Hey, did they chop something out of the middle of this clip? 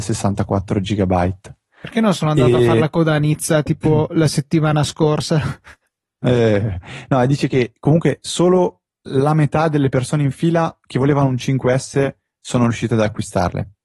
no; 0 cuts

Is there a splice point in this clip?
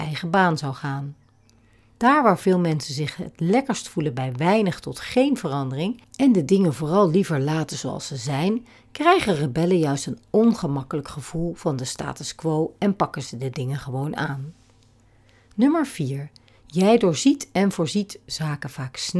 no; 0 cuts

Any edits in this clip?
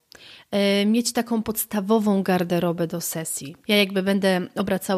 yes; 1 cut; at 3.6 s

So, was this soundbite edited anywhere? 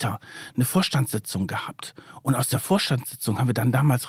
no; 0 cuts

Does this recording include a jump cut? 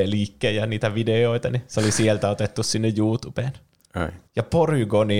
yes; 1 cut; at 4.3 s

